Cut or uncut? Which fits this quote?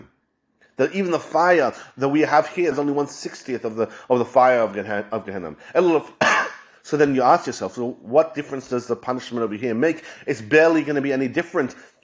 cut